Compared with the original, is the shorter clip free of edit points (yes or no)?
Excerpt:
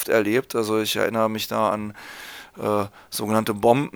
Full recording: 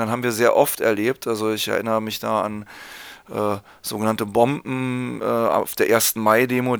yes